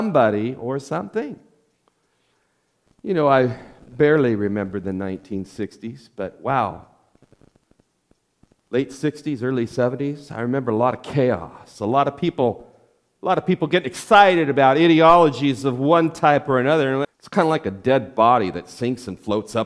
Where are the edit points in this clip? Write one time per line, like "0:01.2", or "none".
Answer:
0:17.0